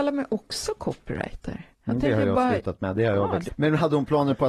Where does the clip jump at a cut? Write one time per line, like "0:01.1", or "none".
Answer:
0:03.5